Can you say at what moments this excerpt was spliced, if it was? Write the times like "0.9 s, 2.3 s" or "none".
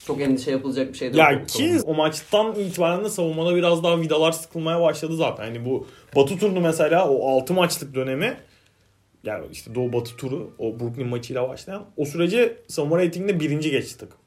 1.8 s